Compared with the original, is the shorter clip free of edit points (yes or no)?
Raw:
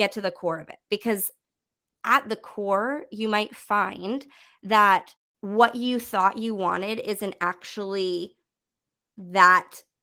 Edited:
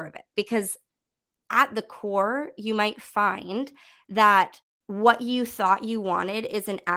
yes